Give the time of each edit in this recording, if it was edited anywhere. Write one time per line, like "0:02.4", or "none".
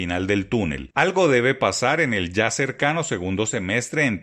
0:00.9